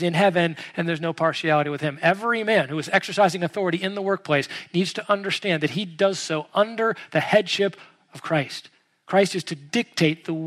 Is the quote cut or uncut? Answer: uncut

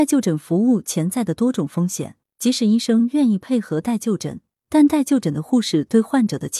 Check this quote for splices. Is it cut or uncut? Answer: cut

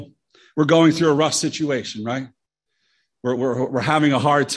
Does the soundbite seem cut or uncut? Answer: uncut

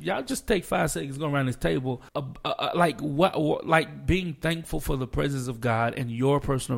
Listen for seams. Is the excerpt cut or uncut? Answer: cut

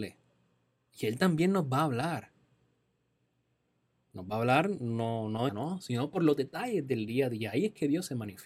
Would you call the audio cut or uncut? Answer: cut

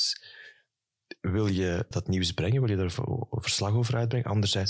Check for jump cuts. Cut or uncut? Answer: cut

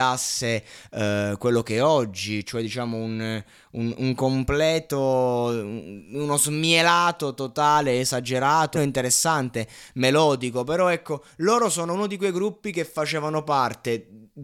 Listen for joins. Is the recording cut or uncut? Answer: cut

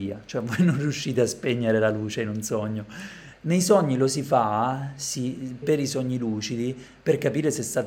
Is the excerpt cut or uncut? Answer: cut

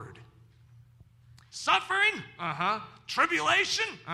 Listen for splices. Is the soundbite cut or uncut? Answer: cut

